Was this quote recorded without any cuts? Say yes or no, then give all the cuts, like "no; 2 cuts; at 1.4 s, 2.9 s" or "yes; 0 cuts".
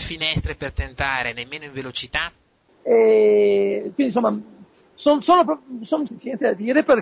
no; 2 cuts; at 2.7 s, 6.1 s